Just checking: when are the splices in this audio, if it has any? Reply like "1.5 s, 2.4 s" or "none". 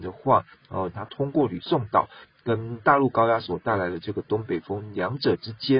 0.9 s

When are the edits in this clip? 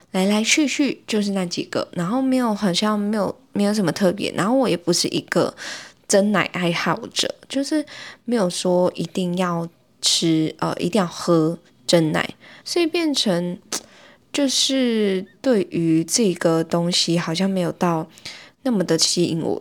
12.6 s, 18.5 s

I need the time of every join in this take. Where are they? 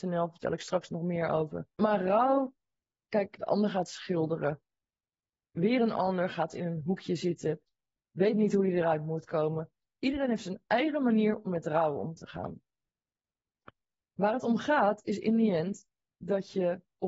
3.4 s

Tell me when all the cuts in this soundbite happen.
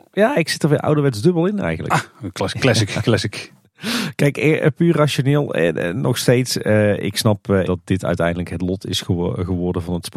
7.6 s

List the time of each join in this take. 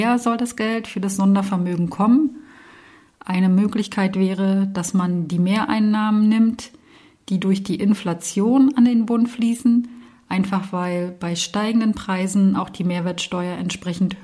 none

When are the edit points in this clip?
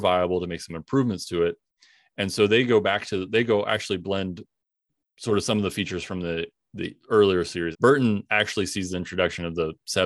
7.7 s

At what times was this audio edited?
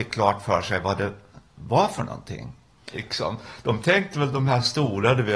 2.9 s

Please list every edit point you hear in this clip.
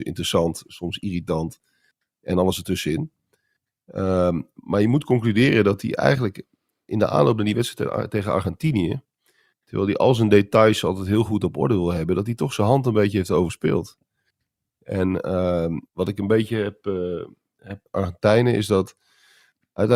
15.9 s, 17.9 s

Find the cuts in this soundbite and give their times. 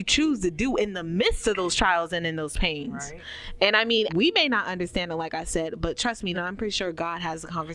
4.1 s, 6.3 s

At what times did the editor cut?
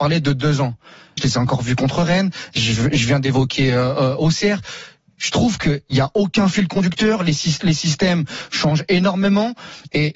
1.2 s

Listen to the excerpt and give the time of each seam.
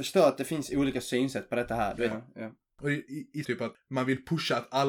2.1 s, 3.4 s

